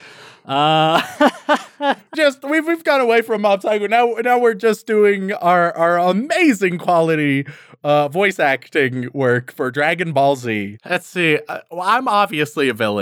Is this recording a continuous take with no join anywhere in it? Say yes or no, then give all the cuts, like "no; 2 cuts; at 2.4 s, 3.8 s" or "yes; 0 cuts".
no; 2 cuts; at 2.1 s, 10.8 s